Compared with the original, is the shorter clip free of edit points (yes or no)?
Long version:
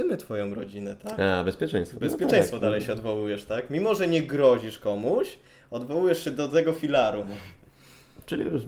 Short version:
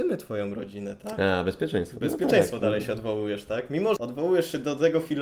no